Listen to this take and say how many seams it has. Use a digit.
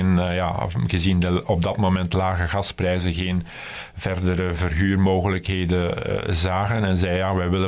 0